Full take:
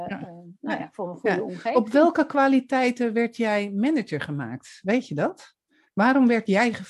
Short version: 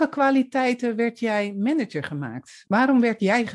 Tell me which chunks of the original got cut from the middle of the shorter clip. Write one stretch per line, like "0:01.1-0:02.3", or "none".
0:04.8-0:05.9